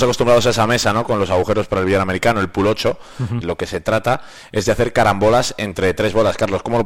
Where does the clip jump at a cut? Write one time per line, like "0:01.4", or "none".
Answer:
0:03.4